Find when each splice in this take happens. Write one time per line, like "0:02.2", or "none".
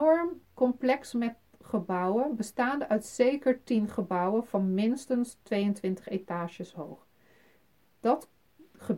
none